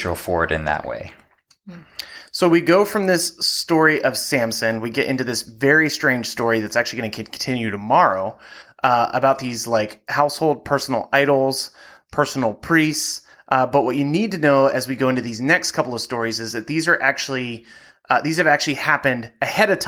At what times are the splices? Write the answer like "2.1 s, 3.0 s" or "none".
none